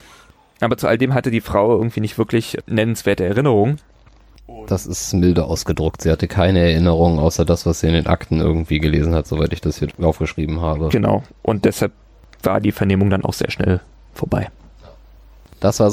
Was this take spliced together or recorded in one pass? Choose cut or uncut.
uncut